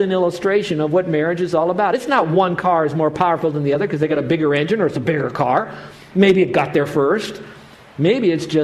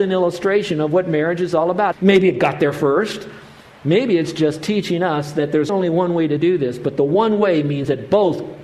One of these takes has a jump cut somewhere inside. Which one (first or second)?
second